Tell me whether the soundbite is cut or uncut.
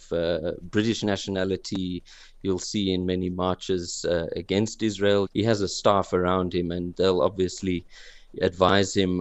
cut